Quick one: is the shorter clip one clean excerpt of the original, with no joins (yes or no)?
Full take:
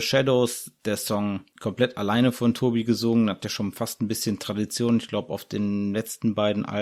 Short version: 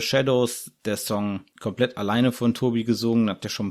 yes